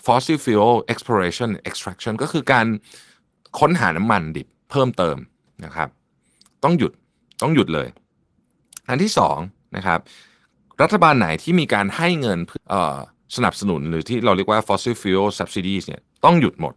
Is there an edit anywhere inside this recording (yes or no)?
yes